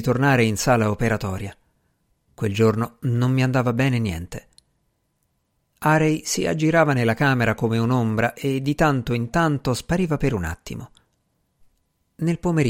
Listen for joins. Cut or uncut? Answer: uncut